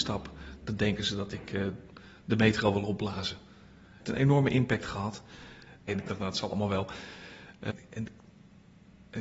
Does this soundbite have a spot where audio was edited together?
yes; 3 cuts; at 4.0 s, 5.9 s, 7.7 s

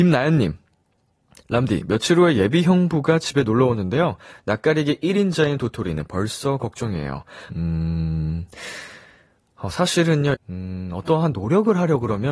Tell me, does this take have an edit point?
yes; 2 cuts; at 7.5 s, 10.3 s

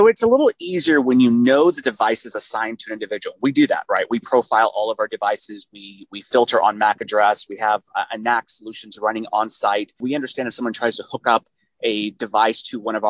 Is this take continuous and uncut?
yes; 0 cuts

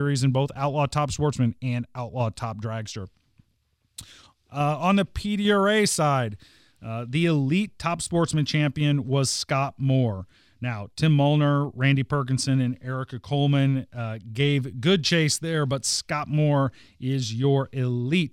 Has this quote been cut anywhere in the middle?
no; 0 cuts

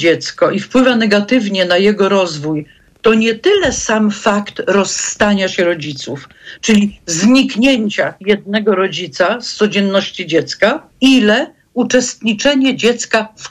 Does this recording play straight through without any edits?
no; 1 cut; at 10.9 s

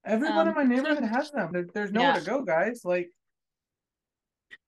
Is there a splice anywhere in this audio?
yes; 1 cut; at 1.5 s

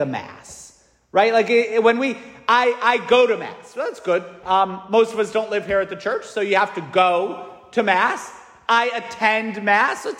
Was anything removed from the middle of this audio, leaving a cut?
yes; 1 cut; at 4.4 s

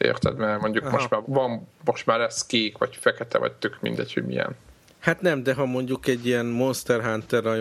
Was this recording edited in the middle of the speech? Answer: yes; 1 cut; at 1.2 s

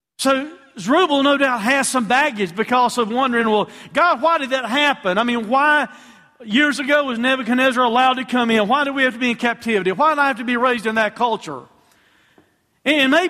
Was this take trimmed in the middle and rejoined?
no; 0 cuts

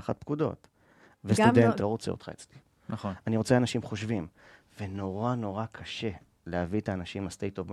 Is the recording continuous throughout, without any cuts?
no; 1 cut; at 1.8 s

